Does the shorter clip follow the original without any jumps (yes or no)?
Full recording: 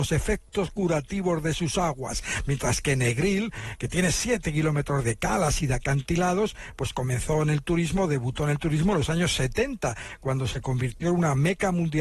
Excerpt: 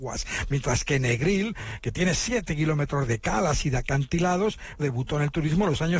no